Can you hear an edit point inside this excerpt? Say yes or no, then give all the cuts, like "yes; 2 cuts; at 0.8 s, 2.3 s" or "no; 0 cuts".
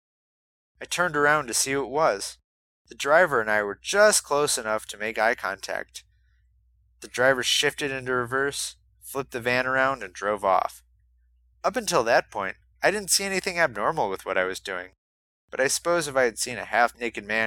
no; 0 cuts